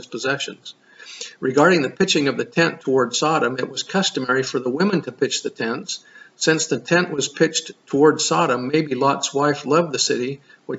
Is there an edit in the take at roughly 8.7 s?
no; 0 cuts

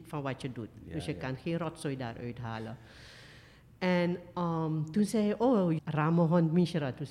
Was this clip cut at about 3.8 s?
no; 1 cut; at 5.8 s

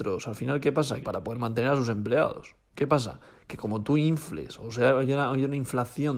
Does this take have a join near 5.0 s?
no; 1 cut; at 1.0 s

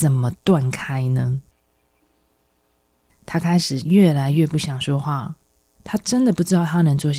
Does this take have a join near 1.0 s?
no; 2 cuts; at 3.1 s, 5.8 s

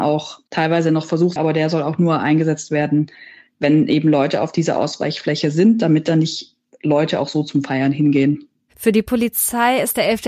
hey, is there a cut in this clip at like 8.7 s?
no; 1 cut; at 1.4 s

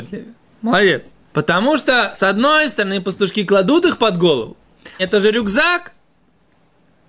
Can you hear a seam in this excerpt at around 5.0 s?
yes; 2 cuts; at 1.3 s, 5.0 s

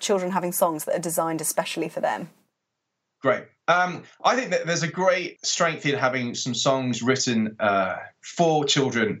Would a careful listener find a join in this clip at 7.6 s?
no; 1 cut; at 5.4 s

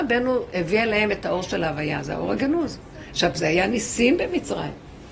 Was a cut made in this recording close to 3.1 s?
no; 0 cuts

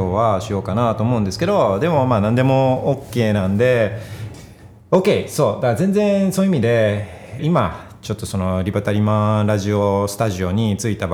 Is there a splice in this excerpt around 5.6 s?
no; 2 cuts; at 4.3 s, 7.4 s

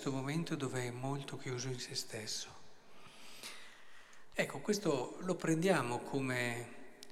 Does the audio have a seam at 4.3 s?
yes; 1 cut; at 4.3 s

